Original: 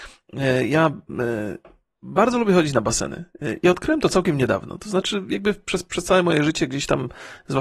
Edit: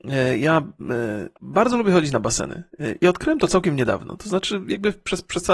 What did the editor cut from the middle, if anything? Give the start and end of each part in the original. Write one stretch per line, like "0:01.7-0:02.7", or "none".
0:01.6-0:02.0